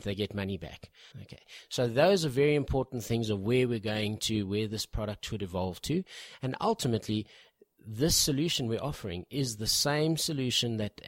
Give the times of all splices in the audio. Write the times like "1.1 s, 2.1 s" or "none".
1.1 s